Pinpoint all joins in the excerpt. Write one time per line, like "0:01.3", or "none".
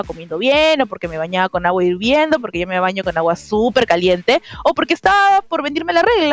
none